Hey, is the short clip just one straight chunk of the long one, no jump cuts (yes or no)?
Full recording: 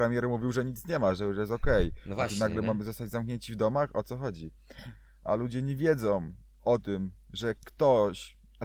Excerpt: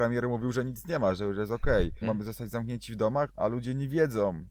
no